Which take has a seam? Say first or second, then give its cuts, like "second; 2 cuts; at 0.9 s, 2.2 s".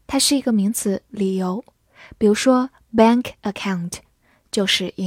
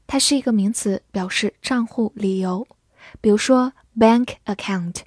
first; 1 cut; at 1.1 s